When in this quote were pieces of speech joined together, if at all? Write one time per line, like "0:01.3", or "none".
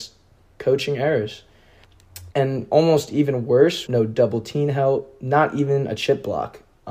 0:02.3
0:03.9